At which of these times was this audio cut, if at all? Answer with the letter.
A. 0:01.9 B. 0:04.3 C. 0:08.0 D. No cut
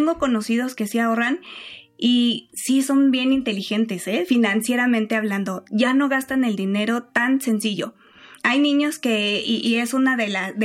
D